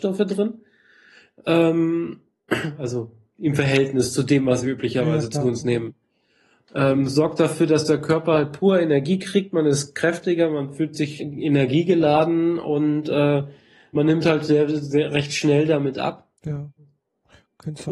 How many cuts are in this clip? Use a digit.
1